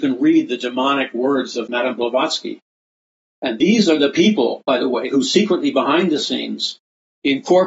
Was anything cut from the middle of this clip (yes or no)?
yes